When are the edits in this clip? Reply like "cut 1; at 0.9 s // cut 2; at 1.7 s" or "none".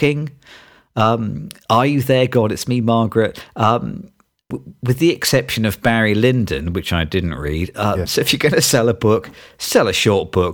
cut 1; at 4.5 s // cut 2; at 8.1 s